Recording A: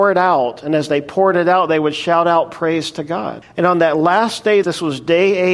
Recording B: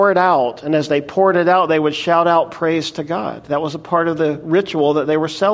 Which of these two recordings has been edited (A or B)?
A